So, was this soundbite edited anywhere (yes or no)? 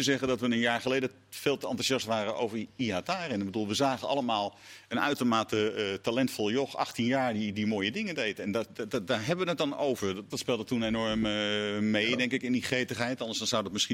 yes